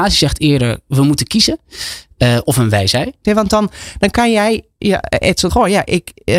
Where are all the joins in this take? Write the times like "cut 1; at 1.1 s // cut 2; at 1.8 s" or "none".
cut 1; at 3.2 s // cut 2; at 5.5 s

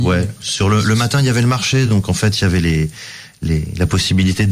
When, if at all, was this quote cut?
none

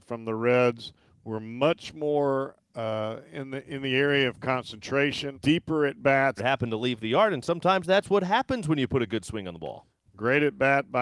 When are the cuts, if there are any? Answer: cut 1; at 5.3 s // cut 2; at 6.4 s

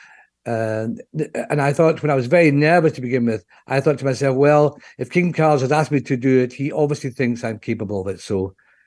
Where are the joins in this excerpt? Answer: none

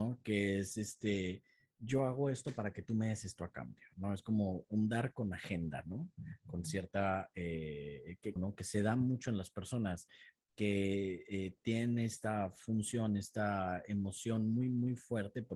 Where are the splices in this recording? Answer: cut 1; at 8.4 s

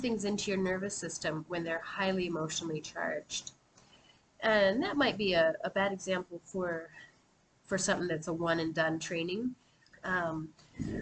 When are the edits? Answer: cut 1; at 9.9 s

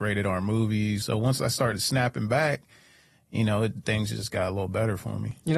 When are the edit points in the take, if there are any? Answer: cut 1; at 1.0 s

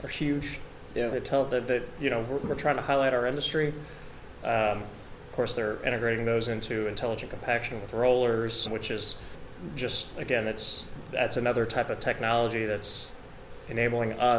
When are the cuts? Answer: cut 1; at 1.1 s // cut 2; at 4.4 s // cut 3; at 8.6 s

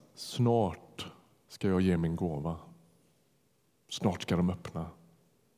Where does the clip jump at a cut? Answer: none

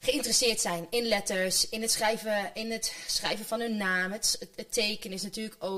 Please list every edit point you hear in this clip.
none

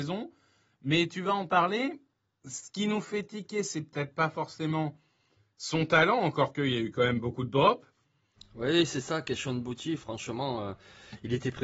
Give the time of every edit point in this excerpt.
cut 1; at 8.4 s

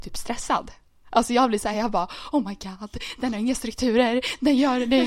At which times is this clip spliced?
none

